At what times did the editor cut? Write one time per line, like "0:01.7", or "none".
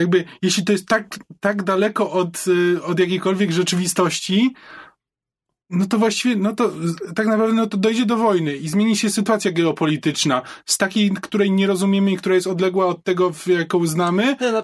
none